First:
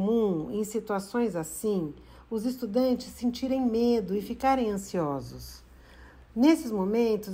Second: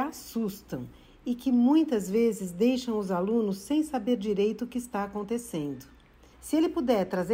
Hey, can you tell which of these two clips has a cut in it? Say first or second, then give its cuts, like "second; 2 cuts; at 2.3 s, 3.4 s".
second; 1 cut; at 6.3 s